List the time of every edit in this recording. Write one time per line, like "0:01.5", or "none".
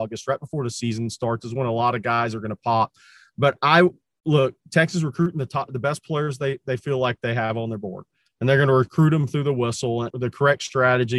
0:10.1